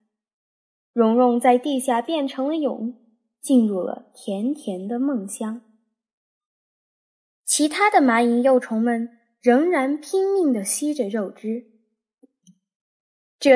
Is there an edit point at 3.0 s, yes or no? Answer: no